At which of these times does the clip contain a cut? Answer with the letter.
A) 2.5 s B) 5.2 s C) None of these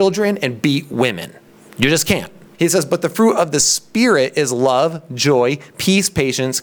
A